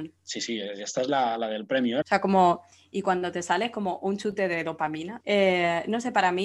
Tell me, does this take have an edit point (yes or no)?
yes